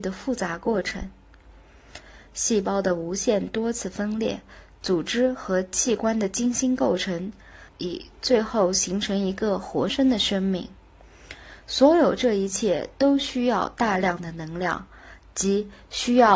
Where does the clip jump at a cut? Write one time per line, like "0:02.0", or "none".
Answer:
0:07.7
0:09.9